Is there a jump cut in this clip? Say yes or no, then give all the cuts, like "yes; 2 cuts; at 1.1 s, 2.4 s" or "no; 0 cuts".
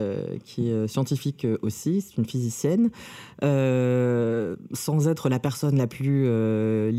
no; 0 cuts